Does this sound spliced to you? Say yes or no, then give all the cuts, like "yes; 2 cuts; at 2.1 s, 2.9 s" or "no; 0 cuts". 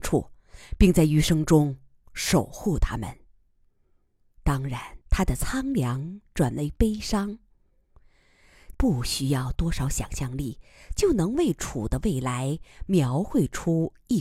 yes; 2 cuts; at 5.0 s, 8.7 s